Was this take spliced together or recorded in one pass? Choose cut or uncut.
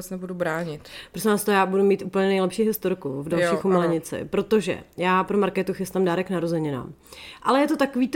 uncut